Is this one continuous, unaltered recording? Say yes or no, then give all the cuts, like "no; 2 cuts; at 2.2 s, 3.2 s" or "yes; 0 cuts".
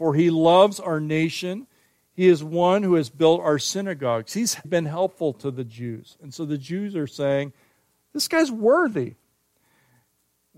no; 1 cut; at 4.6 s